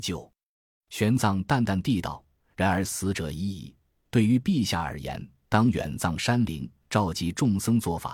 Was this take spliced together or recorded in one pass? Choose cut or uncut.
uncut